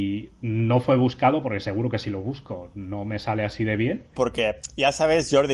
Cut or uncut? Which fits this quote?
cut